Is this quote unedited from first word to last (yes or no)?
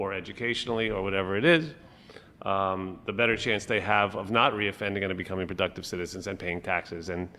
yes